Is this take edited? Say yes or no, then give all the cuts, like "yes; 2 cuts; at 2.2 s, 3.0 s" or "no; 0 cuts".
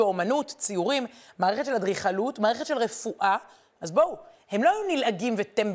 no; 0 cuts